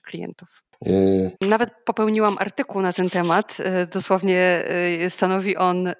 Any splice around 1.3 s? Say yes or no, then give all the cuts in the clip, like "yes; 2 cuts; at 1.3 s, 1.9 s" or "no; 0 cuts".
yes; 1 cut; at 1.3 s